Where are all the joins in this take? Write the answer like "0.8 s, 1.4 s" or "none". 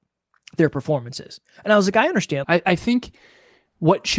2.4 s